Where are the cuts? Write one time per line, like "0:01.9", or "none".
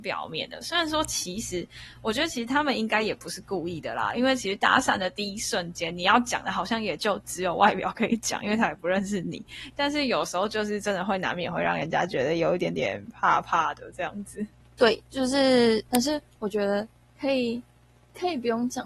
0:15.9